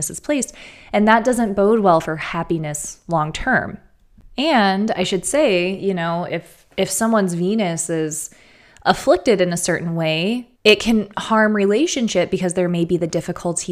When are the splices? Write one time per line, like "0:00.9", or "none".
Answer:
0:10.5